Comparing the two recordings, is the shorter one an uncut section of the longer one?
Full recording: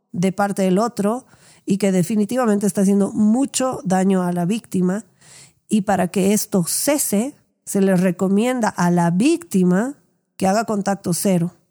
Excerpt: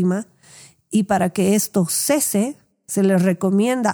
yes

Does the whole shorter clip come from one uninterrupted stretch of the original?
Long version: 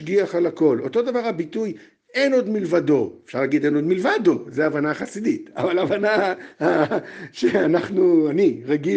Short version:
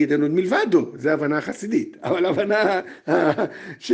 yes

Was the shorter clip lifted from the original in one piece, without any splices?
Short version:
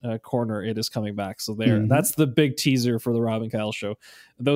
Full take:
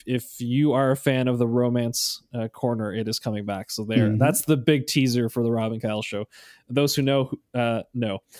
yes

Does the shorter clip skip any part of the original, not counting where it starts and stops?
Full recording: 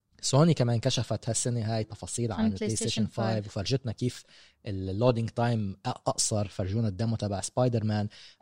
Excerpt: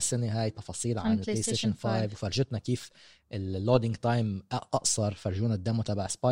no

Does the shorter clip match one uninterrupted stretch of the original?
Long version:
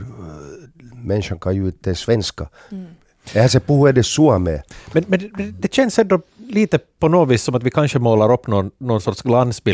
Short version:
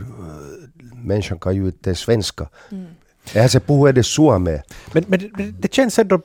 yes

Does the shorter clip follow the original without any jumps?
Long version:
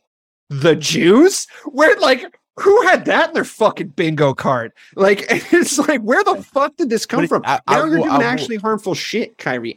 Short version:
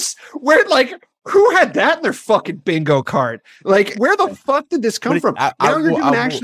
no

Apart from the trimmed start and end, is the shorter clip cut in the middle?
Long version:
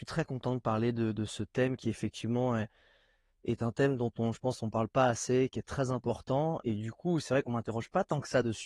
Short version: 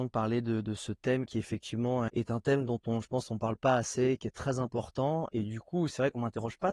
yes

